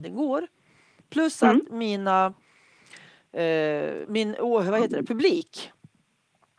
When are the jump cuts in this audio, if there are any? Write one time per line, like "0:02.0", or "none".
0:04.0